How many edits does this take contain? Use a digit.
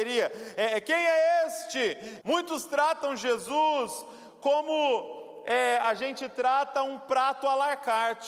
1